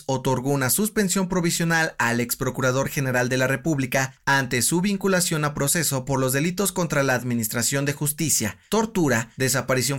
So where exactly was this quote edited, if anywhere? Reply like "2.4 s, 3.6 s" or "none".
4.2 s